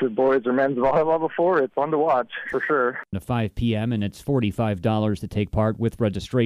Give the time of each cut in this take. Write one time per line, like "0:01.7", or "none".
0:03.1